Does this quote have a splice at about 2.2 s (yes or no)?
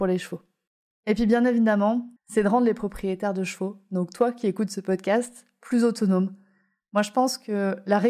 yes